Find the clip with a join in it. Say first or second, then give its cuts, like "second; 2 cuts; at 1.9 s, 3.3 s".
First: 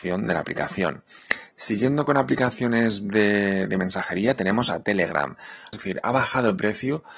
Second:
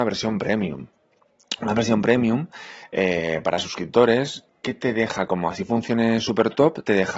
first; 1 cut; at 5.7 s